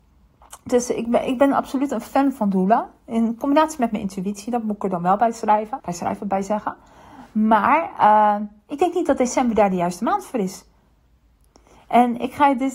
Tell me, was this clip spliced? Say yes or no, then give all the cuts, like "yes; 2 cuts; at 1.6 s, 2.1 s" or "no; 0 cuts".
yes; 1 cut; at 5.8 s